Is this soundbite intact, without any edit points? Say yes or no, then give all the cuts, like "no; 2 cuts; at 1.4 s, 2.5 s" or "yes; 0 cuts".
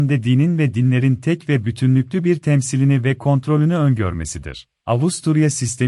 no; 1 cut; at 4.8 s